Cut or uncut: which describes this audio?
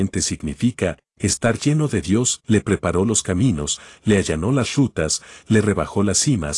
cut